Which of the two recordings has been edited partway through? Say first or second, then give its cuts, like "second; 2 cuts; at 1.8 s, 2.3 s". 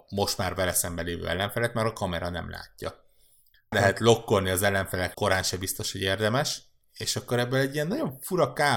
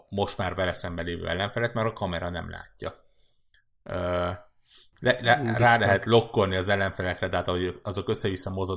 first; 2 cuts; at 3.7 s, 5.1 s